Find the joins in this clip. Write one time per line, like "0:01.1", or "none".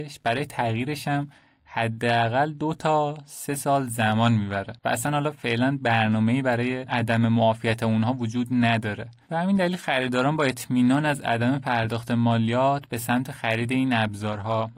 0:04.8